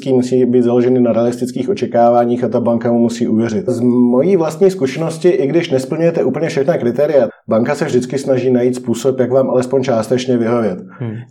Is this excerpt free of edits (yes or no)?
no